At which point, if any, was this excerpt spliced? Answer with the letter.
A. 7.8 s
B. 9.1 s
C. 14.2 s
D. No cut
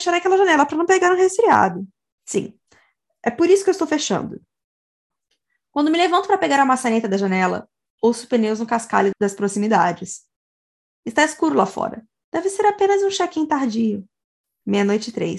B